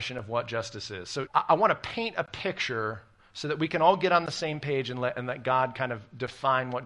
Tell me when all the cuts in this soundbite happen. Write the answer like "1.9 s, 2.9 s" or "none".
1.3 s